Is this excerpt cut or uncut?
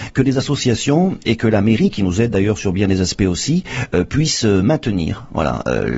uncut